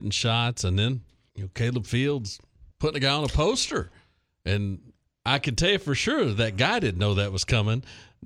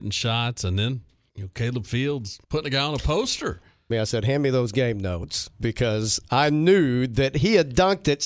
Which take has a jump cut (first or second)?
second